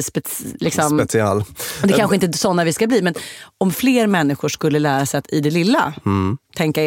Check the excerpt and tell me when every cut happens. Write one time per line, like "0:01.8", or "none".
none